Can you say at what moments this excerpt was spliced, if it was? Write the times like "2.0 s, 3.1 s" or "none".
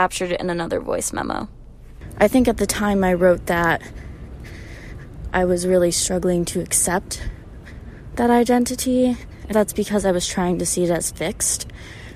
9.5 s